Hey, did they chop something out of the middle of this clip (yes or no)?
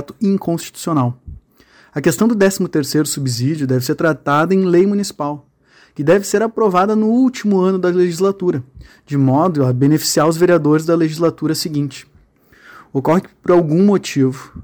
no